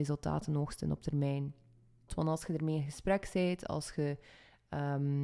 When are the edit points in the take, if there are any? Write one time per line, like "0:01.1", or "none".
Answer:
0:02.1
0:03.7